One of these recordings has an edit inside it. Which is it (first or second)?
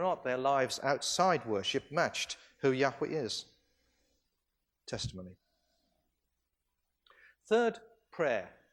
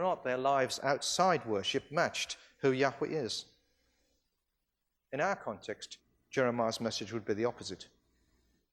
first